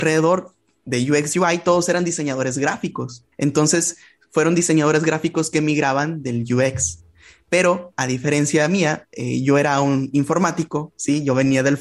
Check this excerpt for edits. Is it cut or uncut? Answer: cut